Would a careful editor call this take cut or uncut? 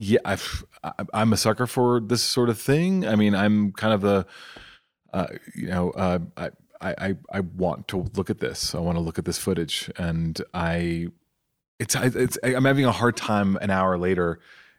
uncut